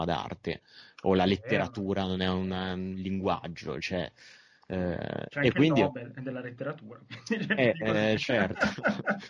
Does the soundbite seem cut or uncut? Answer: uncut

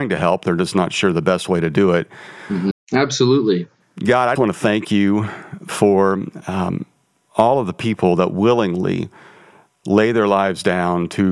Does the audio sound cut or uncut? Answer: cut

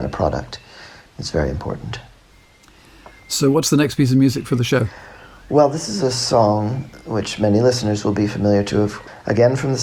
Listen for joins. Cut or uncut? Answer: uncut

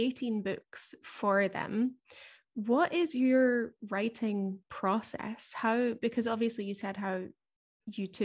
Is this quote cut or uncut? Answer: uncut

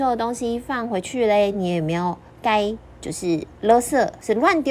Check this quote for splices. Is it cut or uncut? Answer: uncut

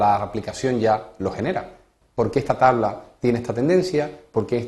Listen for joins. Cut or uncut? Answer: cut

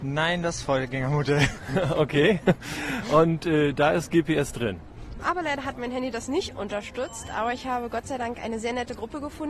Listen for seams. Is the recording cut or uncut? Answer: cut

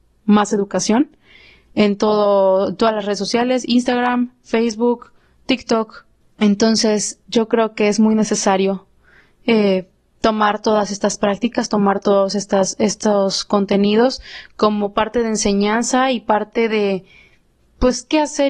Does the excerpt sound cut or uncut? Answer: cut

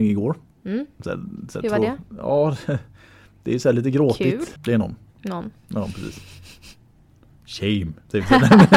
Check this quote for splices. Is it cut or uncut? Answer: cut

